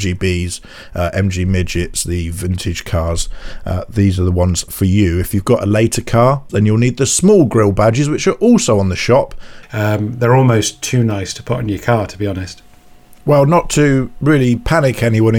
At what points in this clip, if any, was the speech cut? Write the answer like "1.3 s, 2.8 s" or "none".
6.5 s, 9.6 s